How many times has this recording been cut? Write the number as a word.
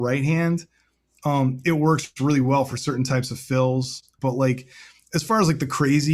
one